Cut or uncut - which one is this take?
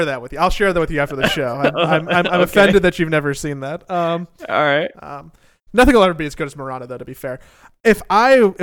cut